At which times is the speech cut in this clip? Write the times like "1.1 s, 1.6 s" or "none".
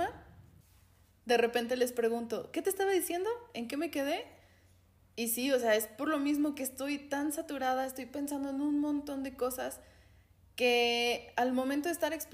none